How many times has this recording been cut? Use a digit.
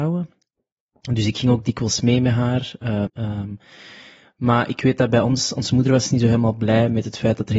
1